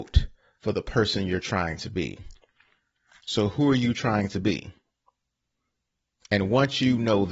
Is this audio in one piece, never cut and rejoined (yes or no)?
yes